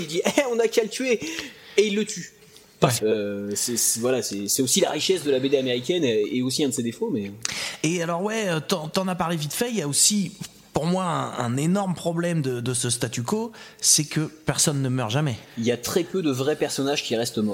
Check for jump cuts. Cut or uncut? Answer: cut